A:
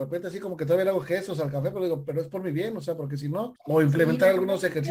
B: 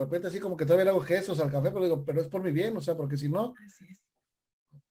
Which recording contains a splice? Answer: A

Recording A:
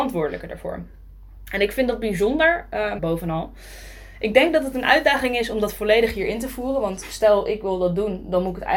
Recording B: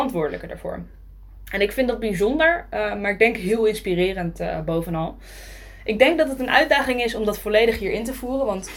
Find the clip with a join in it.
A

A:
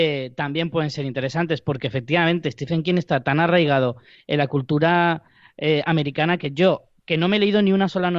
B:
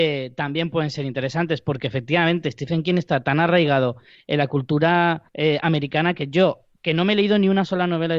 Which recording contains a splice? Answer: B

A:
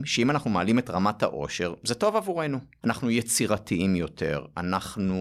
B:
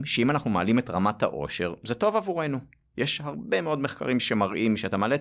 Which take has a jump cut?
A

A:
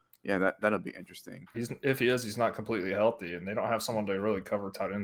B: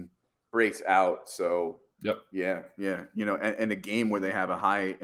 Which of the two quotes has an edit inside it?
A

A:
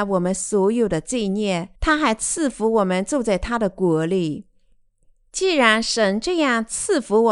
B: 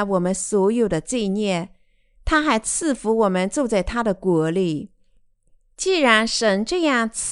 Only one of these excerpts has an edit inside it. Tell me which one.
A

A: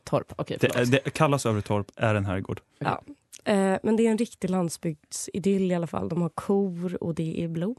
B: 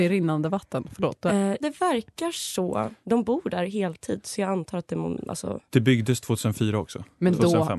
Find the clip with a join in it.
B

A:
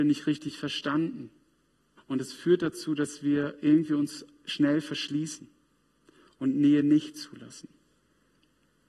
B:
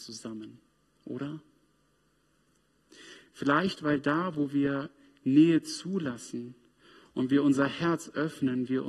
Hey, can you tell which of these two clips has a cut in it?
A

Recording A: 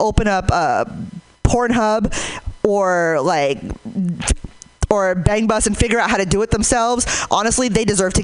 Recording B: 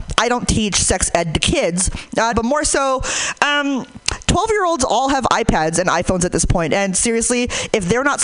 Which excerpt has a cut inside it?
B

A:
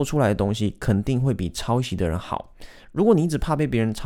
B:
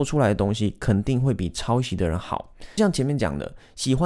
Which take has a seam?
B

